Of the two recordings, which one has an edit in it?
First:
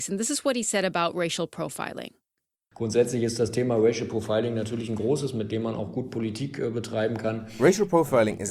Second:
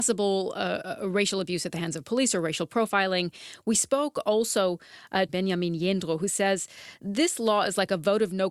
second; 1 cut; at 5.3 s

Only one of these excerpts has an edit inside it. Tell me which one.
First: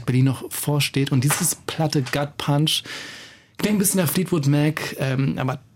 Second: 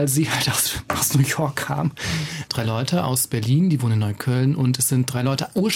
second; 1 cut; at 2.4 s

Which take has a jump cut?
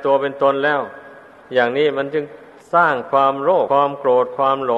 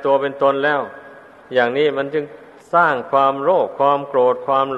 first; 1 cut; at 3.7 s

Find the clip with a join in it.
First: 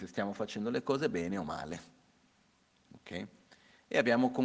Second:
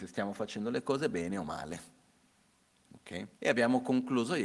second; 1 cut; at 3.3 s

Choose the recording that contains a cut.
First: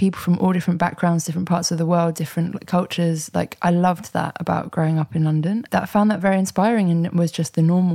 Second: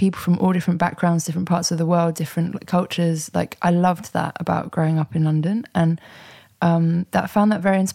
first; 1 cut; at 5.7 s

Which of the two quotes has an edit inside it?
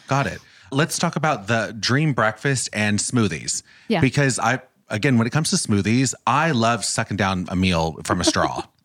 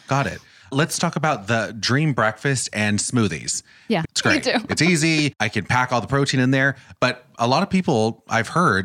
second; 1 cut; at 4.0 s

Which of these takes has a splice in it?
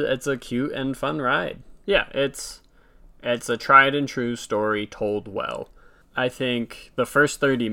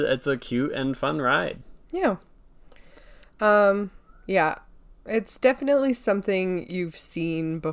first; 2 cuts; at 1.8 s, 6.0 s

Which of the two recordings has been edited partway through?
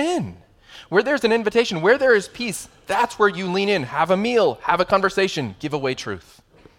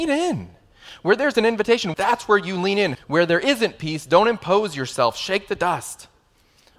second; 2 cuts; at 1.9 s, 2.9 s

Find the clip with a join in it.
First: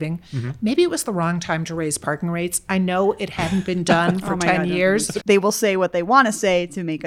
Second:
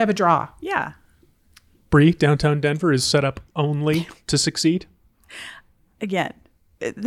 first; 1 cut; at 5.2 s

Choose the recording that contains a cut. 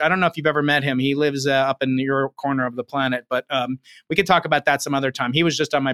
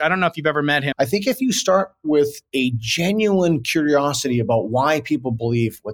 second; 1 cut; at 0.9 s

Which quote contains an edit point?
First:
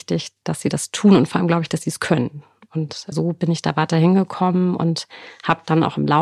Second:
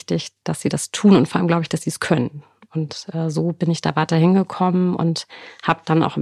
first; 1 cut; at 3.1 s

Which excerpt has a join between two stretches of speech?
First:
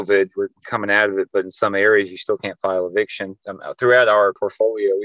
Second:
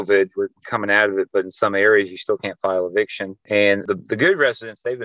first; 1 cut; at 3.4 s

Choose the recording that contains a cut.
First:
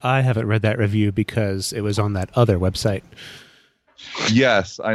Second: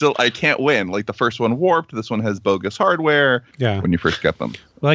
second; 1 cut; at 3.5 s

